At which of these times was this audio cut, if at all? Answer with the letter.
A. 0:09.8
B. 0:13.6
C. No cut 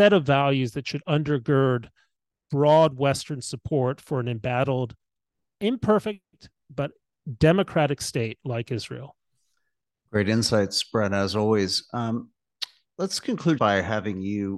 B